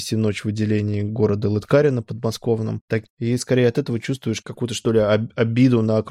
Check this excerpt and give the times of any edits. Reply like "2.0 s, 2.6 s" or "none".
3.1 s